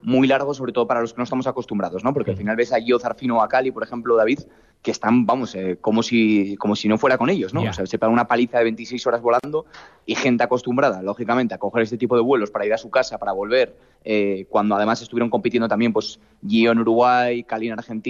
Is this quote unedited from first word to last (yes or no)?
yes